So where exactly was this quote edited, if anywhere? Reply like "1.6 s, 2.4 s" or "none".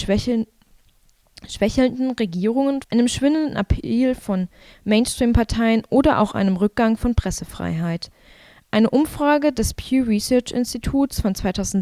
2.8 s